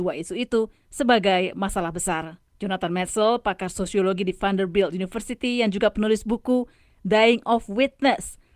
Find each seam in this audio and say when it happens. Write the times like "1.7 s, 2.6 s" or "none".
2.5 s